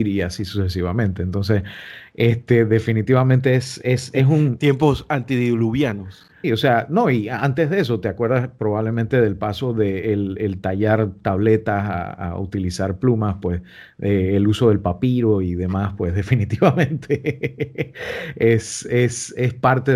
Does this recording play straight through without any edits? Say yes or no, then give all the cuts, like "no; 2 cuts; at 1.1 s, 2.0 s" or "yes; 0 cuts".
no; 1 cut; at 6.4 s